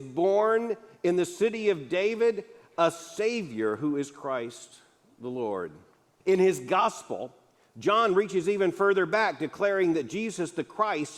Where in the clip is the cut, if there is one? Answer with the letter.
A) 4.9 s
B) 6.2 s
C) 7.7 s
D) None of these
B